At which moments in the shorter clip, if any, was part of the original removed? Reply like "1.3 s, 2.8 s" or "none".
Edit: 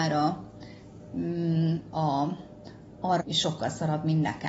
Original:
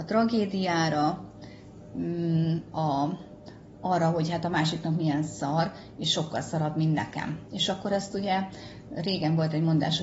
3.2 s